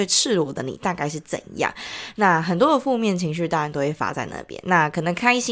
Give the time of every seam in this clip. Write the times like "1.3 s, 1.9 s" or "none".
none